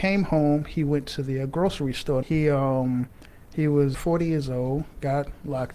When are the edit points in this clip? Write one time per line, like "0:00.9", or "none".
0:02.2
0:03.9